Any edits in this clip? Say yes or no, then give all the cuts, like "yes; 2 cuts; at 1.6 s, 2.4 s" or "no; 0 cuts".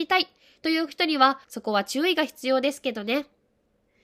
yes; 1 cut; at 1.4 s